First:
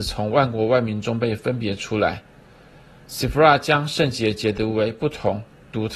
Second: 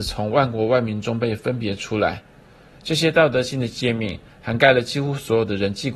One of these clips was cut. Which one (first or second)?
second